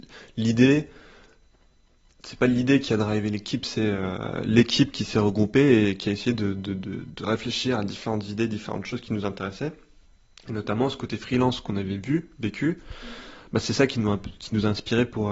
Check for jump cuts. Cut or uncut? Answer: uncut